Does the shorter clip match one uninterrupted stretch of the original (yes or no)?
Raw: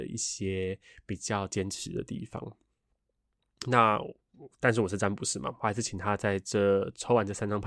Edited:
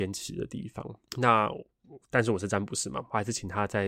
no